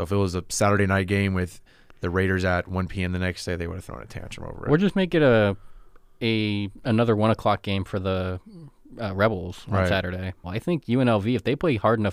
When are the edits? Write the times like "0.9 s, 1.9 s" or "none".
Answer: 10.4 s